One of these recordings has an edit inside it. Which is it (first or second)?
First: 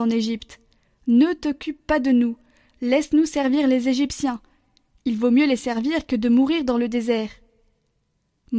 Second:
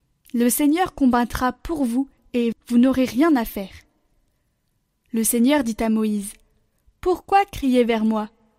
second